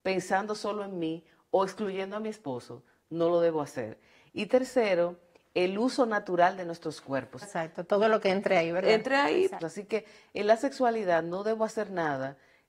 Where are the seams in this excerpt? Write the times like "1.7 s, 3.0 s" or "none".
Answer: 7.4 s, 9.6 s